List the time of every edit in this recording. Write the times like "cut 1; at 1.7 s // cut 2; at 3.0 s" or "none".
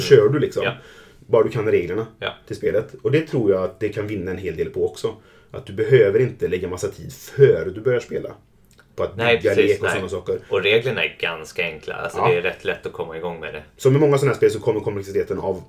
none